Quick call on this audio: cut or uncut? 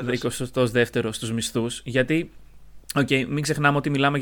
cut